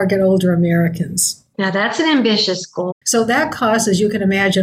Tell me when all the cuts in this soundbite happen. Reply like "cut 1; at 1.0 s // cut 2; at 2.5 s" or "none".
cut 1; at 2.9 s